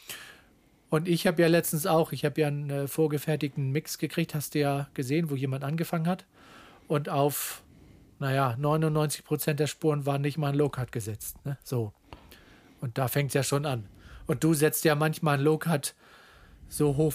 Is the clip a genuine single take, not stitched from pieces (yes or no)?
yes